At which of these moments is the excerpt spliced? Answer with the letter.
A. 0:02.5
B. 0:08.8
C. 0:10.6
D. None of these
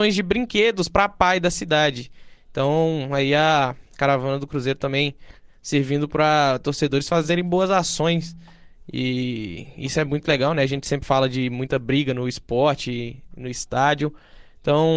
D